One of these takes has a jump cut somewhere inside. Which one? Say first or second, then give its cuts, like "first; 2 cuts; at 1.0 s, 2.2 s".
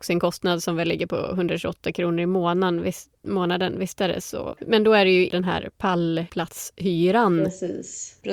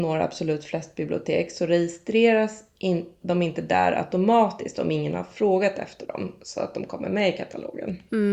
first; 1 cut; at 4.5 s